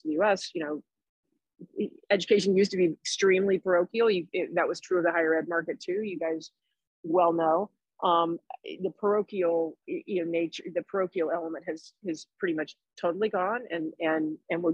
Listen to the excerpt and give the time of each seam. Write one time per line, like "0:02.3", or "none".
0:09.8

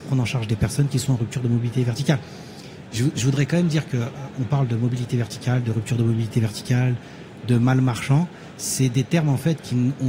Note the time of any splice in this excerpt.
none

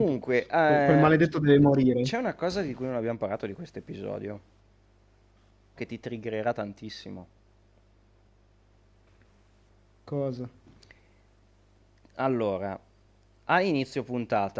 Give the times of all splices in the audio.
0:05.8

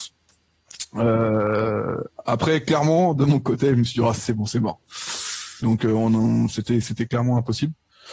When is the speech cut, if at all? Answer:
0:05.6

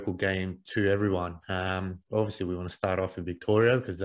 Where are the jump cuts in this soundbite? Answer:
none

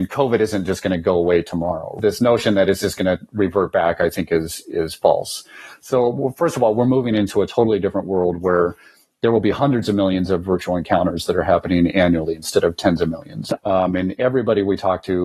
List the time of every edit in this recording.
0:13.6

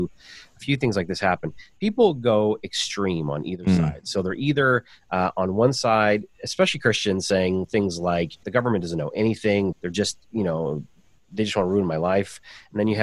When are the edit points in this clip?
0:08.4
0:09.7

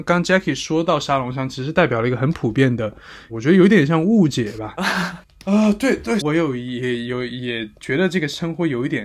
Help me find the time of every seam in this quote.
0:03.3
0:04.8
0:06.2

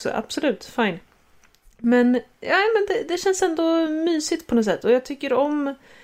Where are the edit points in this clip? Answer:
none

